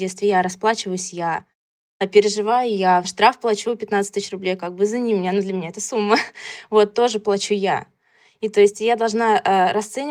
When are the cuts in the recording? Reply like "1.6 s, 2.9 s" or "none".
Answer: 3.0 s